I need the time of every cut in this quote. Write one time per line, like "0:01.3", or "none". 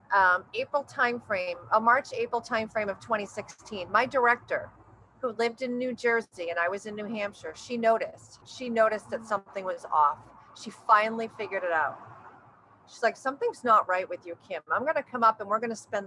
0:08.4